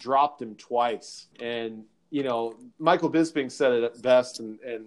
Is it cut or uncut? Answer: cut